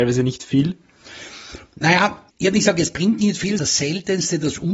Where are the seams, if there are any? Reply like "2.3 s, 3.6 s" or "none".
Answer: 2.3 s, 3.6 s